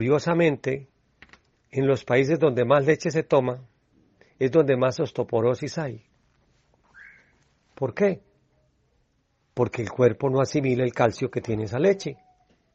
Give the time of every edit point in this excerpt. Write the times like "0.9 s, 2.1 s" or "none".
none